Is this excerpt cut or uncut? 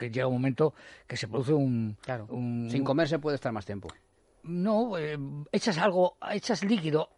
uncut